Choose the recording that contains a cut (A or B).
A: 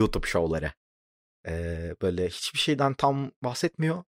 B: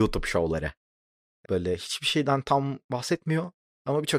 B